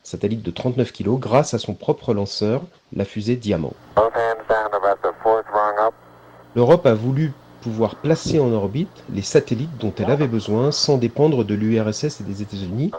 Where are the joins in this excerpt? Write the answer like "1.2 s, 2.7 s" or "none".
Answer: none